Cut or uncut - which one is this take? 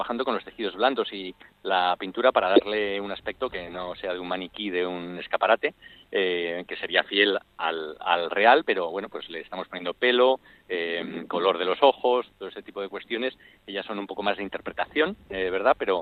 uncut